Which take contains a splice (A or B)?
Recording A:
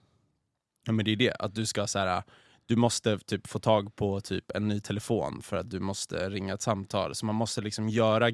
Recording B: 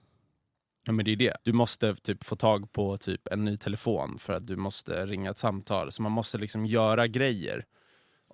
B